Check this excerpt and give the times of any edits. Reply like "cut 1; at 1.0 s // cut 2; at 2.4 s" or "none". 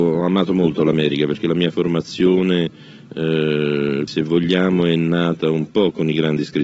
cut 1; at 4.1 s